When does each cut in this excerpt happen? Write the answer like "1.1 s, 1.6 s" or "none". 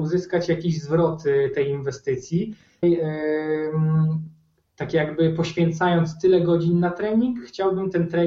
2.8 s